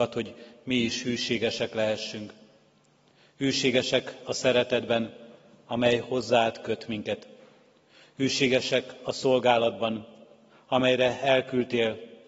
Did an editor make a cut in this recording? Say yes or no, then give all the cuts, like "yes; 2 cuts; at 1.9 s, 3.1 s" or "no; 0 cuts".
no; 0 cuts